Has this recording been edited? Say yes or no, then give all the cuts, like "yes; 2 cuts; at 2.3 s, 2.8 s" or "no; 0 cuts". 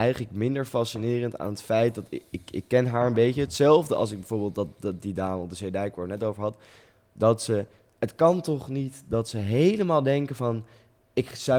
no; 0 cuts